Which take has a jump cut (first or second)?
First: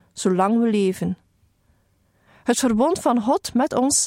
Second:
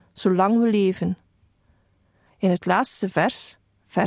second